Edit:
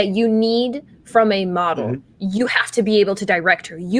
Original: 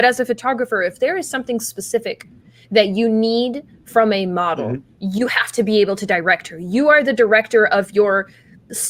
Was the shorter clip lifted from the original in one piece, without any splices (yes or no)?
yes